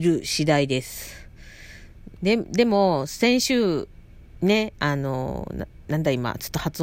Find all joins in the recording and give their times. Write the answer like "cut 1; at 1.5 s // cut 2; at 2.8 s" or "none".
cut 1; at 2.2 s